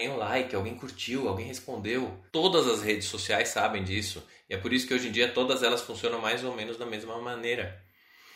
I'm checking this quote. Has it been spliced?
yes; 1 cut; at 2.3 s

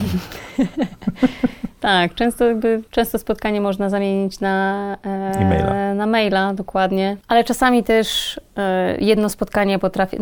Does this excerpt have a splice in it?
no; 0 cuts

